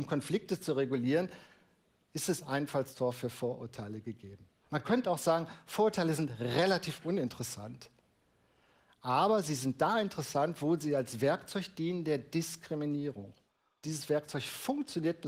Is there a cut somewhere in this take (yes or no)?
yes